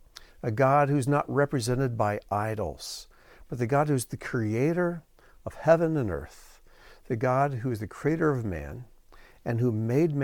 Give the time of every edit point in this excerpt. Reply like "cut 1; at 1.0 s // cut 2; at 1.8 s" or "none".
none